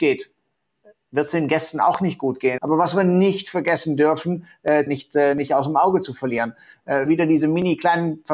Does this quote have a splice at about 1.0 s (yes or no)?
no